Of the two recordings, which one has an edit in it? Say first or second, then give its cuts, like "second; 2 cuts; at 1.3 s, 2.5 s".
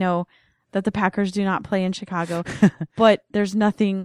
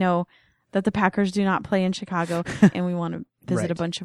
second; 1 cut; at 2.7 s